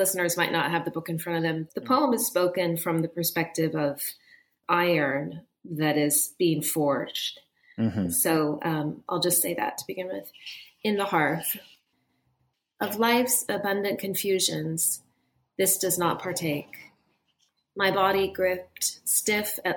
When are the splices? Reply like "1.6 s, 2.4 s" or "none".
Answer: 1.7 s